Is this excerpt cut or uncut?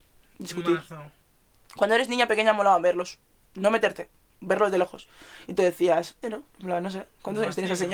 cut